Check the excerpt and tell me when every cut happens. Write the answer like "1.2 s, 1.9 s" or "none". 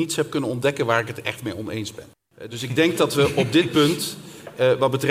none

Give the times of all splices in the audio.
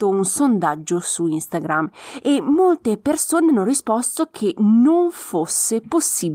none

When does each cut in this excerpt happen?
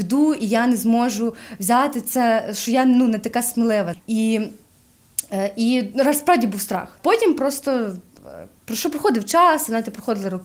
3.9 s, 7.0 s

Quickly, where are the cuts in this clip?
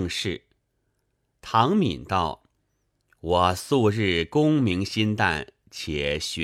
none

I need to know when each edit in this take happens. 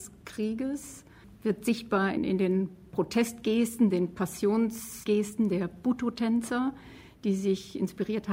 none

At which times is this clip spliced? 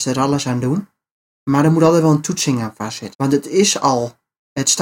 3.1 s

